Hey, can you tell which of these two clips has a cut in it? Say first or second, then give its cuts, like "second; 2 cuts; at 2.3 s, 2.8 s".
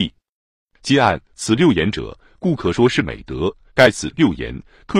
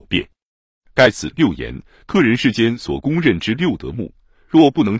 first; 1 cut; at 3.7 s